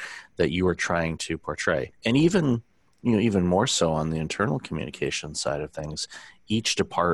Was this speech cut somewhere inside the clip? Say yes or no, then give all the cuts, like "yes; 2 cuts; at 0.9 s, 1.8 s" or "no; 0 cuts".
yes; 1 cut; at 1.9 s